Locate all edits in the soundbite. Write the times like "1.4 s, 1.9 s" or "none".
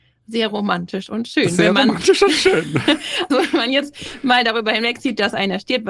3.3 s